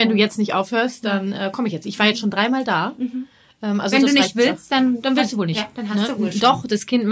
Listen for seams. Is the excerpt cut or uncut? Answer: uncut